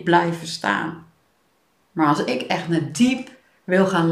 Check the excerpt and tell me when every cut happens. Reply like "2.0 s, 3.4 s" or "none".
1.8 s